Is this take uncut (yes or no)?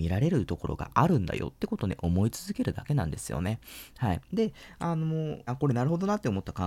no